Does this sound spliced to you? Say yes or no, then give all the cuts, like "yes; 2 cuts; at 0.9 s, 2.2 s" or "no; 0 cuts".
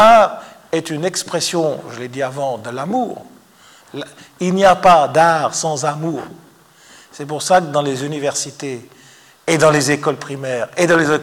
no; 0 cuts